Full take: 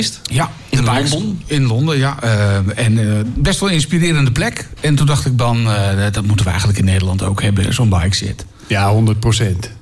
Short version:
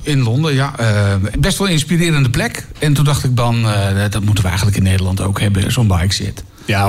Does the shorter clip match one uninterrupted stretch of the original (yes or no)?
no